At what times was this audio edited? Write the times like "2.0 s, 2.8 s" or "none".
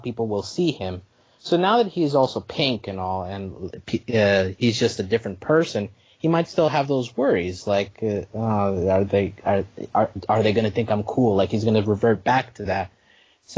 none